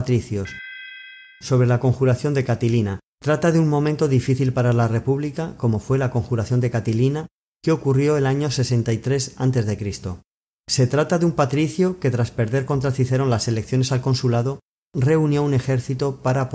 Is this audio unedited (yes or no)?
yes